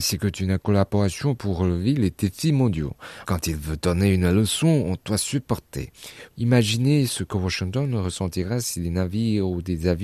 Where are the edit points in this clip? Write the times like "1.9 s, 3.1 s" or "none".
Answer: 3.2 s, 6.3 s